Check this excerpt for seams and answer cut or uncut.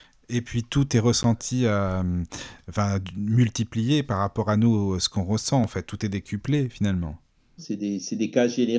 cut